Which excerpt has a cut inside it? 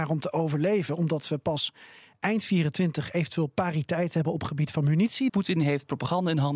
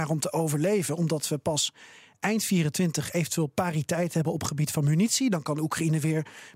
first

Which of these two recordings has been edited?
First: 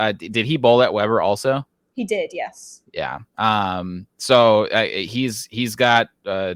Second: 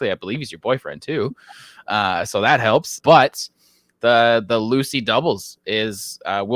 second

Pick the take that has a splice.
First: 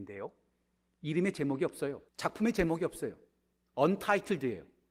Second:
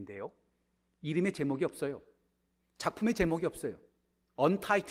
first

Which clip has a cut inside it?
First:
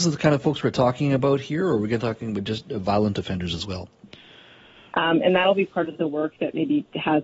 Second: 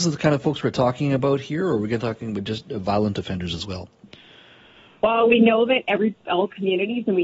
first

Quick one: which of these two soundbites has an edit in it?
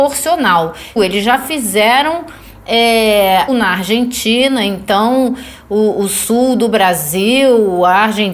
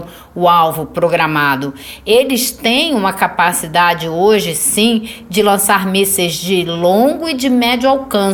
first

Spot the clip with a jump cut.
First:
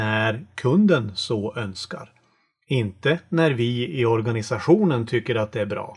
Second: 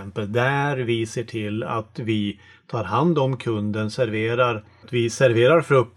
second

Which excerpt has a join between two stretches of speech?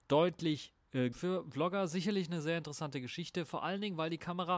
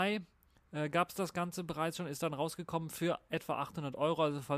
first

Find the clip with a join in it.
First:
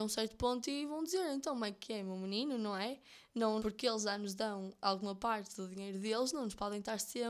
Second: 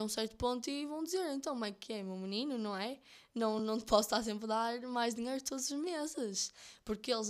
first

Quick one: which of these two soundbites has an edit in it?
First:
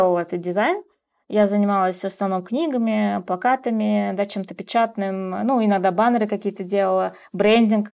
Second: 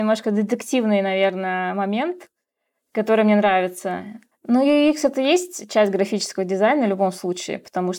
second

